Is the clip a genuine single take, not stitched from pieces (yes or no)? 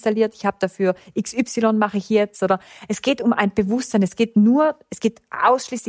yes